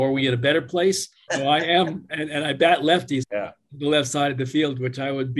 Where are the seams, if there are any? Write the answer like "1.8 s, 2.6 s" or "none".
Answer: 1.3 s, 3.2 s